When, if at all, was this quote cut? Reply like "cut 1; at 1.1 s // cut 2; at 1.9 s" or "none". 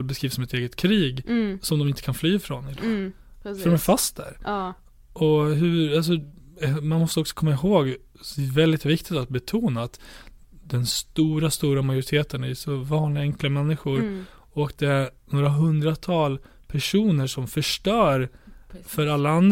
none